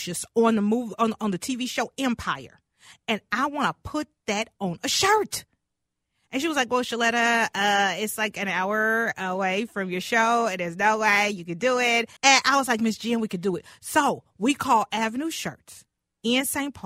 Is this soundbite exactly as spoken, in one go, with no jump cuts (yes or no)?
no